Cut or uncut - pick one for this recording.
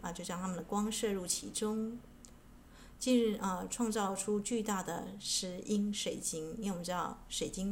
uncut